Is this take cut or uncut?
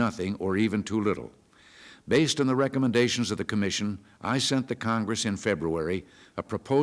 uncut